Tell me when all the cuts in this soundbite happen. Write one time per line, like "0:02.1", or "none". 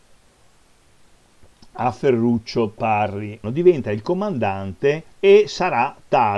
0:03.4
0:05.1